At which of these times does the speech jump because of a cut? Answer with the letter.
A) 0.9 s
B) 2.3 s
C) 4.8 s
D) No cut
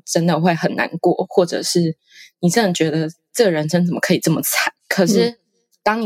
C